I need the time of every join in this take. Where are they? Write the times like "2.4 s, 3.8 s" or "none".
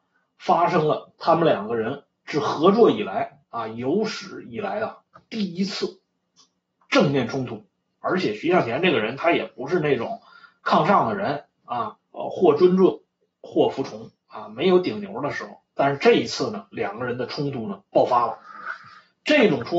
7.9 s, 12.0 s